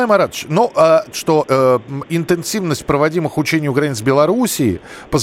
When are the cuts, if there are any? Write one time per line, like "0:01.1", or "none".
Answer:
0:01.1